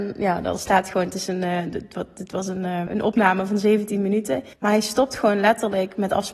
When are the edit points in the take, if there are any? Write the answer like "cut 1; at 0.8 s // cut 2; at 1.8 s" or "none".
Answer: cut 1; at 2.9 s // cut 2; at 4.5 s